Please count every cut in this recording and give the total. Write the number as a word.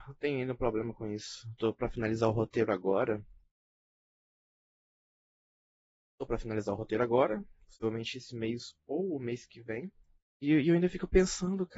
one